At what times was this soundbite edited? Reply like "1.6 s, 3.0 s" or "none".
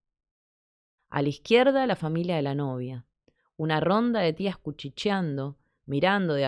1.0 s